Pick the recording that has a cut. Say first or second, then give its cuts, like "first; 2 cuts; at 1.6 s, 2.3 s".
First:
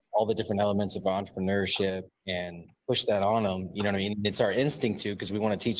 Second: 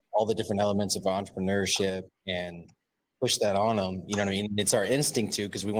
first; 1 cut; at 2.8 s